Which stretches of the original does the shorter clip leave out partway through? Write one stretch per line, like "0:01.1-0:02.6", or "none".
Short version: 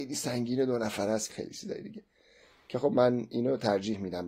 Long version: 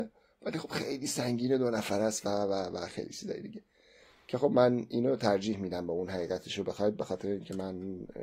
0:02.2-0:02.9